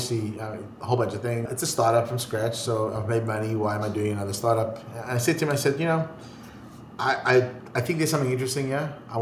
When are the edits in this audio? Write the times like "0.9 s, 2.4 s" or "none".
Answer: none